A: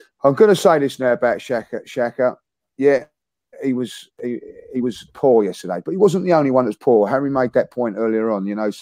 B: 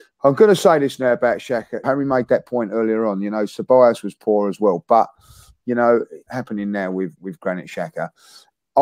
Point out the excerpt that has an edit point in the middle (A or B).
B